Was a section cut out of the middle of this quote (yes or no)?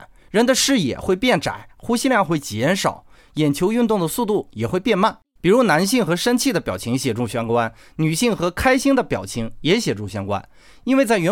yes